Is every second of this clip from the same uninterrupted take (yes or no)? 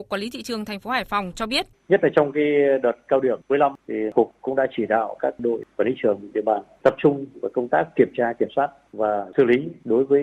no